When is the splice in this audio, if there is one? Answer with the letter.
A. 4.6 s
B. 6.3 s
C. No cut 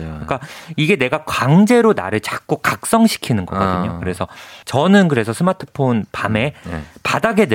A